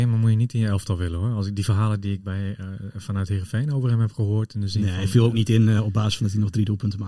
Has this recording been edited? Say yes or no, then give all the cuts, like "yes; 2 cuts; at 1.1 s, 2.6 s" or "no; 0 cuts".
no; 0 cuts